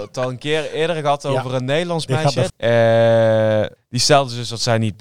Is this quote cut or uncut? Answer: cut